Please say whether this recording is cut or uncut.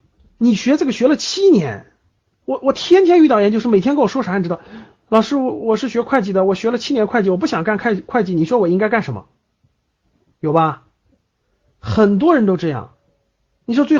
uncut